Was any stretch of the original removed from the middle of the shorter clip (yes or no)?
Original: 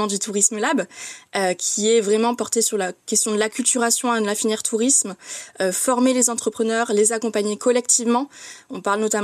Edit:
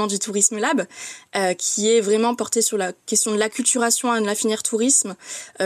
no